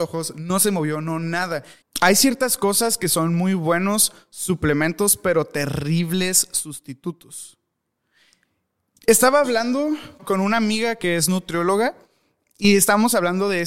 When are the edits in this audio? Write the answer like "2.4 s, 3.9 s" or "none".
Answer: 1.8 s, 10.2 s